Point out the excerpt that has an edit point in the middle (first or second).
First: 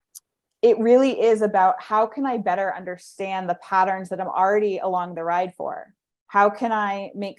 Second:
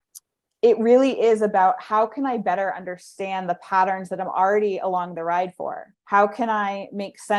second